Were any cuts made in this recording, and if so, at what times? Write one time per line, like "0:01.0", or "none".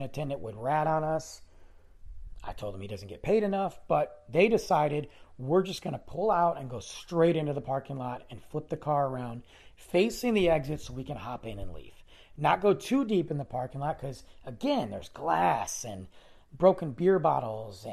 none